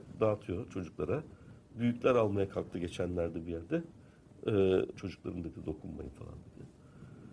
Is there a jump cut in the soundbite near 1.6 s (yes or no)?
no